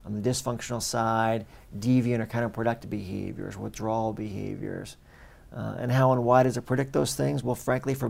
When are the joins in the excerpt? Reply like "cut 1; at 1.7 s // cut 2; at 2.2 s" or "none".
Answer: none